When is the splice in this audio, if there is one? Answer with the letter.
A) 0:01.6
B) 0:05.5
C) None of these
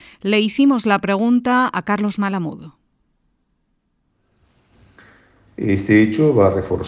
B